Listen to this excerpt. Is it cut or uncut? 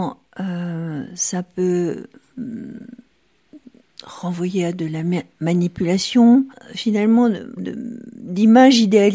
cut